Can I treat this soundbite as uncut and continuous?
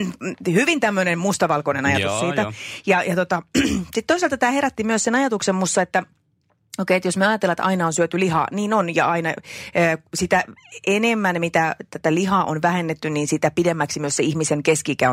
yes; 0 cuts

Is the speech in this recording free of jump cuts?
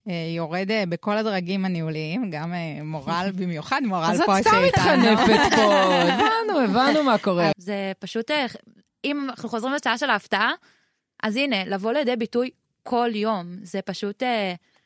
no; 1 cut; at 7.5 s

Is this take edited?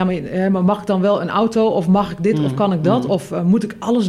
no; 0 cuts

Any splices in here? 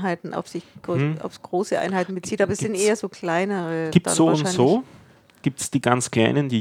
no; 0 cuts

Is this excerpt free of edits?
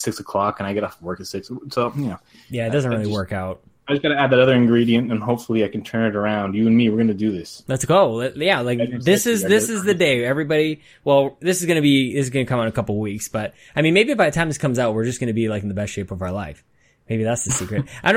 yes; 0 cuts

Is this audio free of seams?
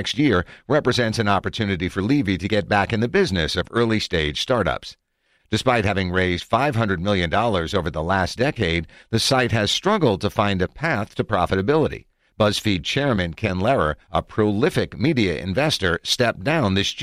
no; 1 cut; at 5.4 s

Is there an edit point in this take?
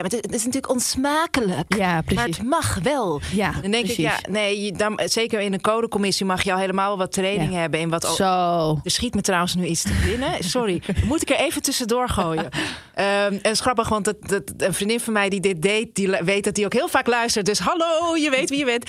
no; 0 cuts

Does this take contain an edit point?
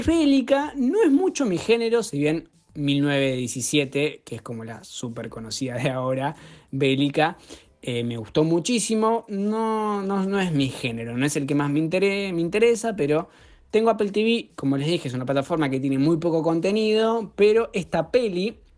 no; 0 cuts

